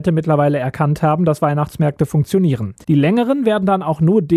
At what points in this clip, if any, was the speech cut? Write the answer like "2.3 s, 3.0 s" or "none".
2.8 s